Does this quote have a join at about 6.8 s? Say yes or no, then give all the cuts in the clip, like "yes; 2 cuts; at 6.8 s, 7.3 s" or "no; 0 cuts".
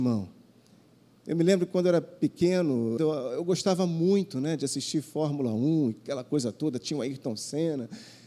no; 1 cut; at 3.0 s